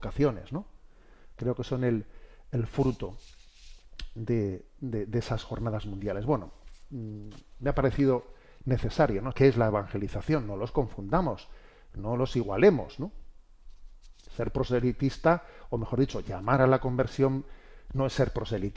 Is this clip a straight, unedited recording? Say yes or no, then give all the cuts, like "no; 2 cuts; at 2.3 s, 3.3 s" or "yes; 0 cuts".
no; 1 cut; at 9.3 s